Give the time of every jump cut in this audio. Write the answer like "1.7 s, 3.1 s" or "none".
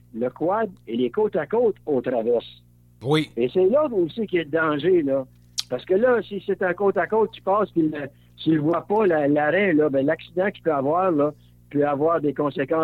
none